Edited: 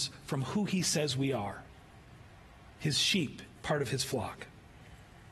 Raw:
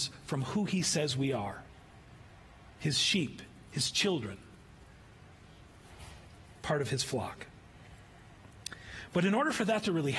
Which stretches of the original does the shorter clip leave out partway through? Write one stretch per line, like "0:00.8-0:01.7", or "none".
0:03.6-0:06.6